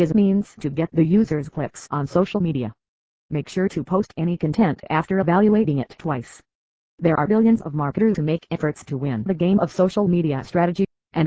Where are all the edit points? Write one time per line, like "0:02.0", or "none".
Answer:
none

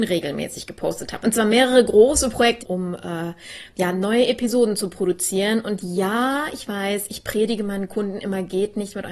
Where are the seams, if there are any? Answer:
0:01.2
0:02.6

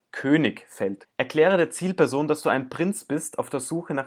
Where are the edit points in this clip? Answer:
0:01.0

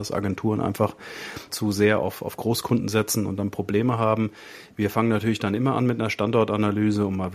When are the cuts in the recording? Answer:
0:01.5

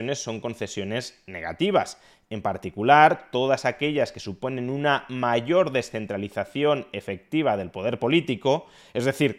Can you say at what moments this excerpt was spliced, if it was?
none

